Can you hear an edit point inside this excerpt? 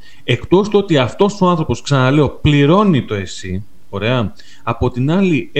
no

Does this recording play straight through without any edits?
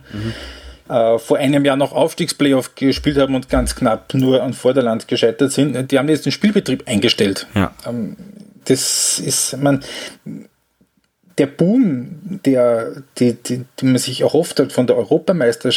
no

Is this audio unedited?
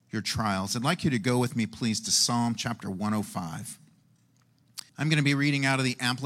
no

